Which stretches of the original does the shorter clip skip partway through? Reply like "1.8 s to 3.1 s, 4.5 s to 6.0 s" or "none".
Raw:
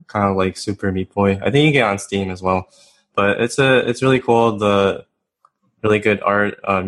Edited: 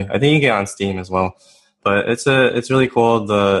none